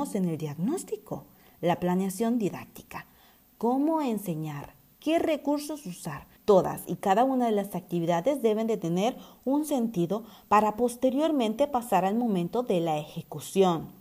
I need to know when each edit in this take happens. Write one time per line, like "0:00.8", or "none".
0:06.4